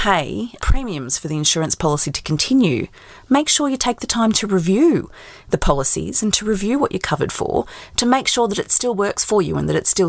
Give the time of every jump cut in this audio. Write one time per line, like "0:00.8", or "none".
none